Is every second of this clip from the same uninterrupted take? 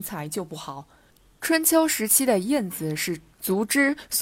no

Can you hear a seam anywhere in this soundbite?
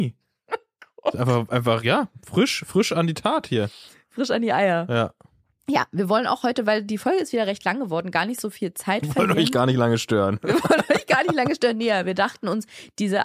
no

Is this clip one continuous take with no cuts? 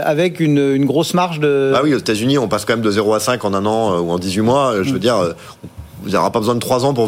yes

